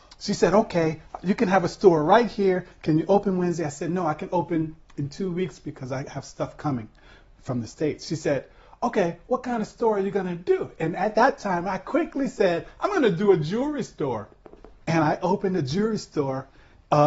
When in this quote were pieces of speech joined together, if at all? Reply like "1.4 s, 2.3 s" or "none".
14.8 s